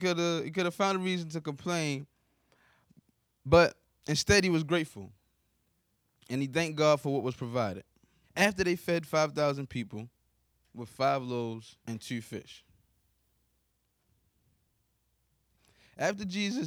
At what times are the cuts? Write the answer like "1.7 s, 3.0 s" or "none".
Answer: 8.2 s, 11.8 s